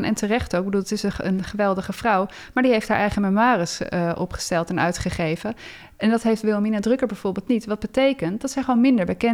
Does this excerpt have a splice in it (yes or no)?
no